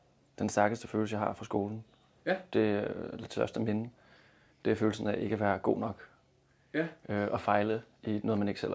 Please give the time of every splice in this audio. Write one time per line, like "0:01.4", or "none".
none